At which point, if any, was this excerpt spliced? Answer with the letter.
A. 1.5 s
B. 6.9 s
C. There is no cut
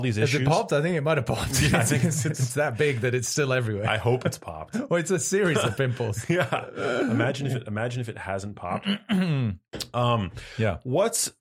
C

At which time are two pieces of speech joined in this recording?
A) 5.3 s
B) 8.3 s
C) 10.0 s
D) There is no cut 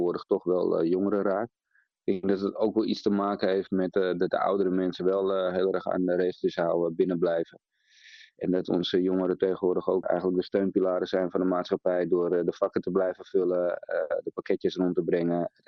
C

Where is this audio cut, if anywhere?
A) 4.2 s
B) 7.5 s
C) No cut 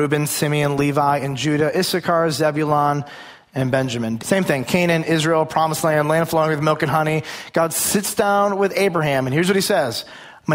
A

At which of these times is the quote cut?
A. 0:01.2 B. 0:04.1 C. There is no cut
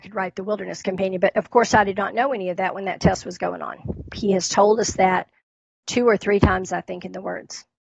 B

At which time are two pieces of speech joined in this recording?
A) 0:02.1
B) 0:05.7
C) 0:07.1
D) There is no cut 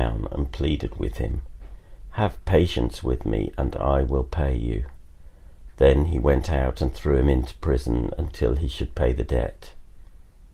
B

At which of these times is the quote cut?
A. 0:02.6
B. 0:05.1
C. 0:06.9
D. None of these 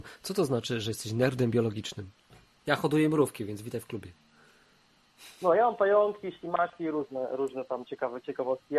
A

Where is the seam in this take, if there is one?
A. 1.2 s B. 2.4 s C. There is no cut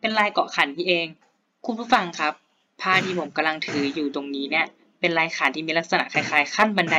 C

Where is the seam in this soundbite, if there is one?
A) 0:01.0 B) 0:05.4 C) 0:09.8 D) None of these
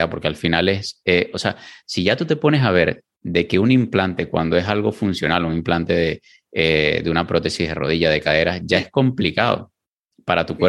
D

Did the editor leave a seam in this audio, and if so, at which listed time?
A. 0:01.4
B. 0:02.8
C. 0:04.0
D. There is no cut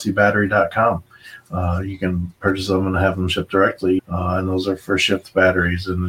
C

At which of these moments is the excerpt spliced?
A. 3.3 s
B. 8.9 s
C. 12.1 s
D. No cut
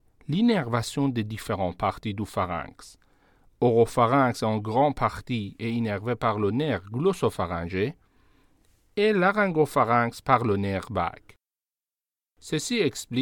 D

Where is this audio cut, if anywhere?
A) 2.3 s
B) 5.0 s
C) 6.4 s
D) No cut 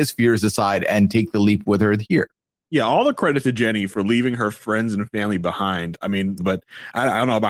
C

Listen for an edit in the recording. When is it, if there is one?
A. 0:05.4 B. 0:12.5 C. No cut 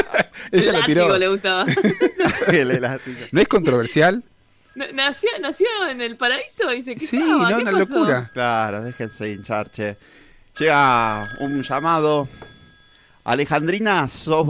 C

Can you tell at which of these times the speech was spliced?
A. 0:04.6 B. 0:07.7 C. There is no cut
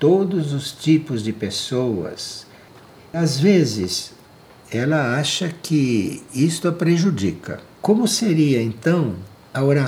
B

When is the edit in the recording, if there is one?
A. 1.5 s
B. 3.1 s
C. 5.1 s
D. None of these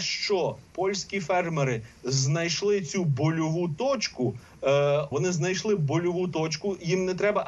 C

